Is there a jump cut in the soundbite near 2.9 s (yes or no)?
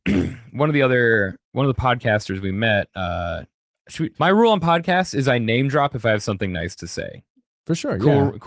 no